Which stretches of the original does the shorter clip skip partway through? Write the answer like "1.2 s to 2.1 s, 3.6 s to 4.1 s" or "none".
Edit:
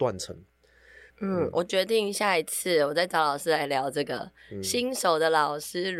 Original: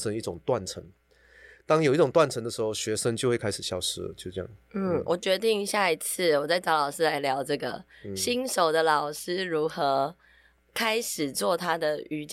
1.6 s to 4.6 s